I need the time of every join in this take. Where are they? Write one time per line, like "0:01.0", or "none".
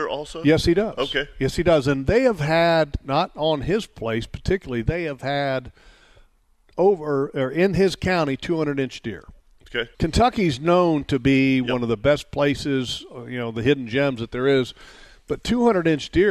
0:09.9